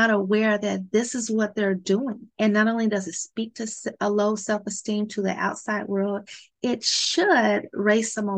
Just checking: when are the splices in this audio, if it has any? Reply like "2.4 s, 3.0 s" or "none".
2.3 s